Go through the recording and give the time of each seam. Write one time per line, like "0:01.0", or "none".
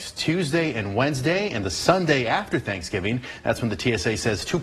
0:01.6